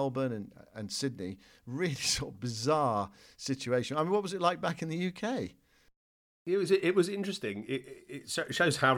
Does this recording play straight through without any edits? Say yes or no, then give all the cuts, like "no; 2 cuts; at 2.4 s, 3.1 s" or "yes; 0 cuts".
yes; 0 cuts